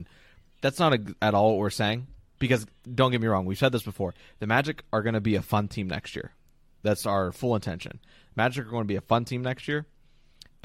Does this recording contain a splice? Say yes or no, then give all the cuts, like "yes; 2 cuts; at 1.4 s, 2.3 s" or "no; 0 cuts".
yes; 1 cut; at 2.4 s